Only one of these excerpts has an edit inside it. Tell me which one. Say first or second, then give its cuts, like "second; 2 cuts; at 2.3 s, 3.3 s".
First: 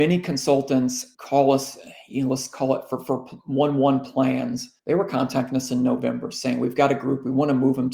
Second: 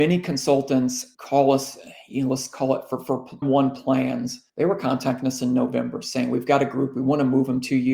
second; 1 cut; at 3.4 s